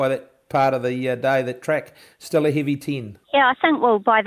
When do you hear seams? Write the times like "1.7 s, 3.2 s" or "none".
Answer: 3.2 s